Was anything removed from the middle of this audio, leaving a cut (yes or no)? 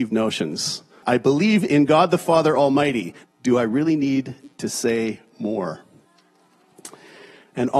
yes